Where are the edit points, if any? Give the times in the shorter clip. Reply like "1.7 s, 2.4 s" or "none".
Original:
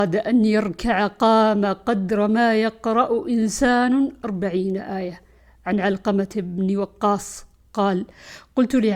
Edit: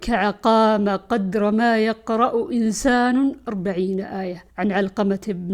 4.5 s